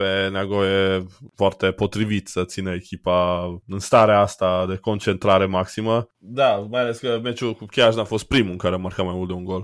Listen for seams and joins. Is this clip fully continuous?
no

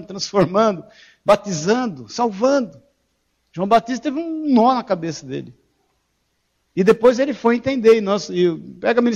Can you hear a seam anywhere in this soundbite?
no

